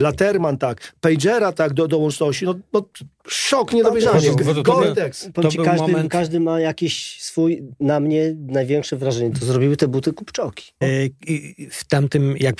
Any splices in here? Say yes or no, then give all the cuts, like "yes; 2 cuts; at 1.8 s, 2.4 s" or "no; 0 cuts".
yes; 2 cuts; at 9.3 s, 10.8 s